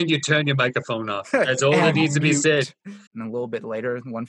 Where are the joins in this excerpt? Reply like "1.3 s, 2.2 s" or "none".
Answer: 1.2 s, 3.1 s